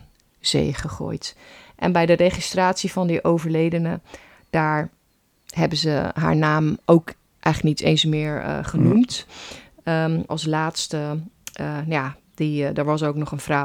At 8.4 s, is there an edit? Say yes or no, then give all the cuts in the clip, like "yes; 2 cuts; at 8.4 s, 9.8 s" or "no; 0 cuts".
no; 1 cut; at 10.3 s